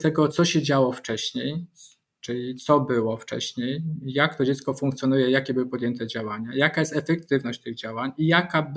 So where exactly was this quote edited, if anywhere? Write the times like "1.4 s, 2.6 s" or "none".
none